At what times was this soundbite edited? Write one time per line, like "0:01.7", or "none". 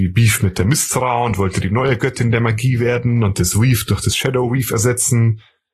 none

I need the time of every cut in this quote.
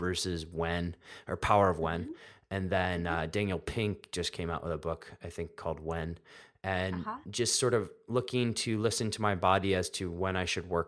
none

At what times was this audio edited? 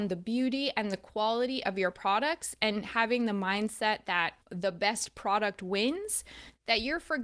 0:04.4

